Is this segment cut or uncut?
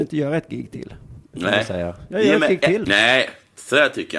cut